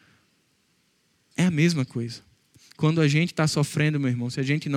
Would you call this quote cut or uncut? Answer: uncut